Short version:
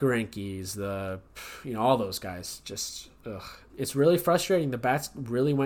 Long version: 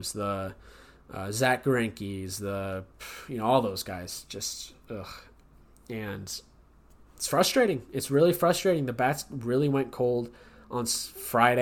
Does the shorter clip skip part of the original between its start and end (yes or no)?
yes